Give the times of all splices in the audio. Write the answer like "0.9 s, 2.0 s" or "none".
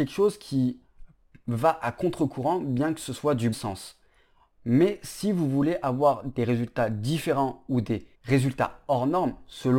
3.5 s, 8.1 s